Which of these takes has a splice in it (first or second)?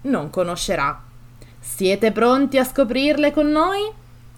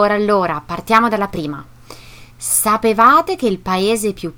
first